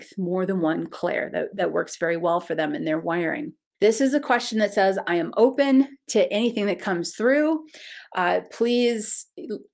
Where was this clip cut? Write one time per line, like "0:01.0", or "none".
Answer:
0:03.7